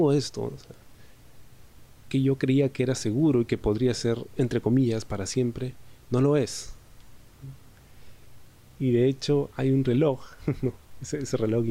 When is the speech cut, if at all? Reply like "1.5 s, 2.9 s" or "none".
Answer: none